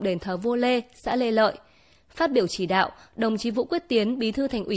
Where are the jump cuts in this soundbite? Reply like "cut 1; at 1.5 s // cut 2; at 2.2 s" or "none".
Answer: none